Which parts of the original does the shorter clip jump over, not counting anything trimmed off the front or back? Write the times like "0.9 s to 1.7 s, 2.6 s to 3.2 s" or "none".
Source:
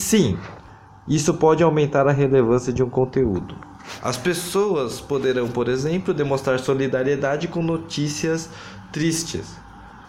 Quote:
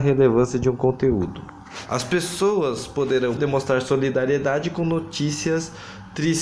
5.5 s to 6.1 s